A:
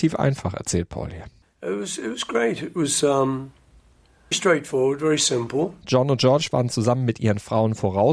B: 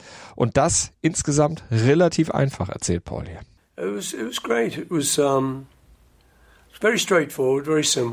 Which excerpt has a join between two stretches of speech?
A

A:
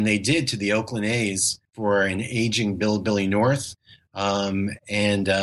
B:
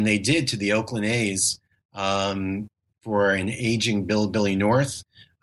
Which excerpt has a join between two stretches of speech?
A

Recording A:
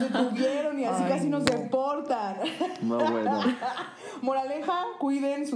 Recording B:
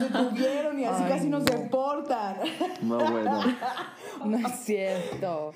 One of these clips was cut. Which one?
B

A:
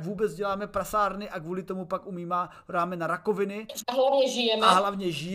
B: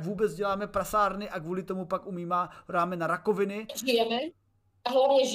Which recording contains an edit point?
A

